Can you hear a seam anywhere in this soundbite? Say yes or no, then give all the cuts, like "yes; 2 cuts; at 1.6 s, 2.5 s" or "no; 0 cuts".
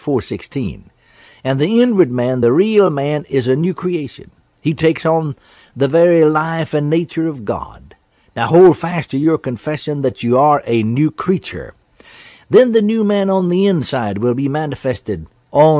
no; 0 cuts